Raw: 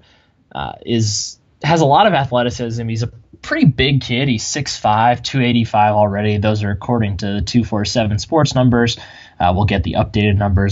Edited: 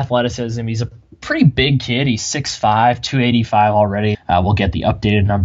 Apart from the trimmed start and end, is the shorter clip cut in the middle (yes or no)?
yes